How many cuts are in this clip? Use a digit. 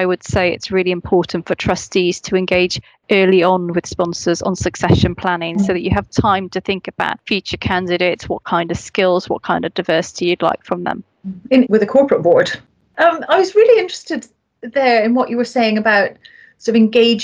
1